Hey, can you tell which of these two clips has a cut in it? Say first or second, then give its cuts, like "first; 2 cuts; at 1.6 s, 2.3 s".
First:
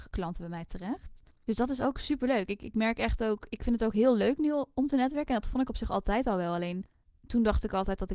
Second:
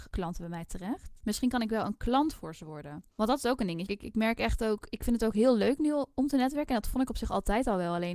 second; 2 cuts; at 1.2 s, 3.9 s